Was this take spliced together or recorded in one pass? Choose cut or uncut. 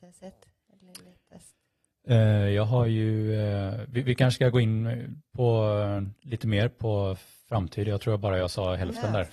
uncut